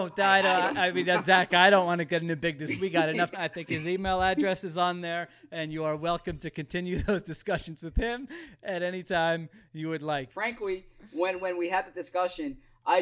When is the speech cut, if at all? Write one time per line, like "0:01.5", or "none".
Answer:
0:03.3
0:10.3